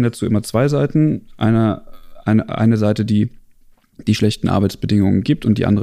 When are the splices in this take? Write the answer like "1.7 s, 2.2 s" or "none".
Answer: none

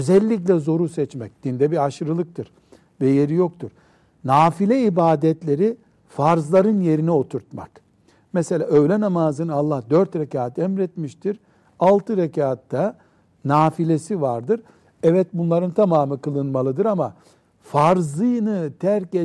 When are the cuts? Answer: none

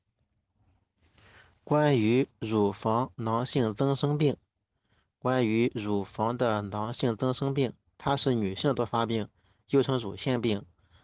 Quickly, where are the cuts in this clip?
none

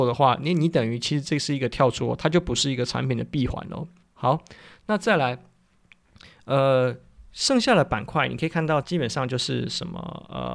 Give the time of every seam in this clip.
4.0 s, 8.8 s

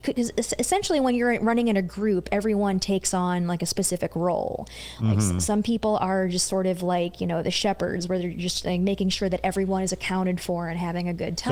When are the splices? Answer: none

